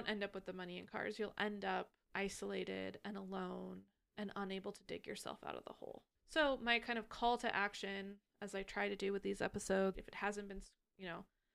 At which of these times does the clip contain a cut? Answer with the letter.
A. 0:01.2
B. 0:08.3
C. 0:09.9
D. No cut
C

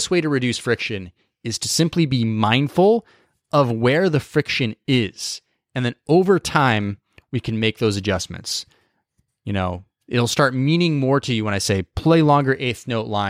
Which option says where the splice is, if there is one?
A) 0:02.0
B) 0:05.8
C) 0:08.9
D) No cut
D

